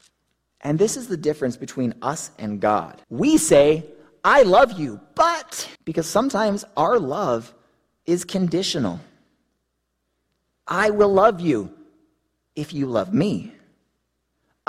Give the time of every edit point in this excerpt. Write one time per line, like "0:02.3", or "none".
0:03.0
0:05.8